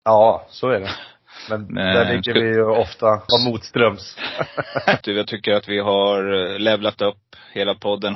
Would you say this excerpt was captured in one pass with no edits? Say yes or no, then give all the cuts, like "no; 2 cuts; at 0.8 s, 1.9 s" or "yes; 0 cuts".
no; 2 cuts; at 3.3 s, 5.0 s